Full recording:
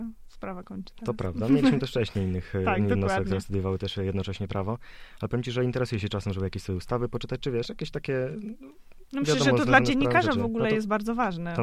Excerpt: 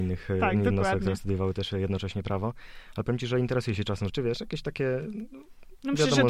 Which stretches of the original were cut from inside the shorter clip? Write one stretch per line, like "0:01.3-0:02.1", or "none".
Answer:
0:06.3-0:07.4